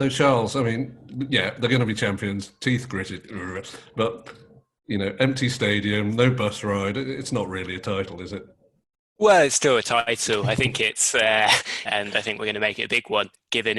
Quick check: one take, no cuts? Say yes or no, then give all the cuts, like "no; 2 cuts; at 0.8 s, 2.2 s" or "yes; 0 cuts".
no; 1 cut; at 11.8 s